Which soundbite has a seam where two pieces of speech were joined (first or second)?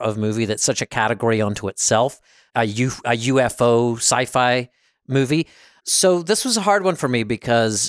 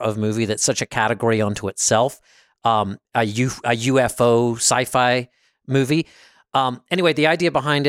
first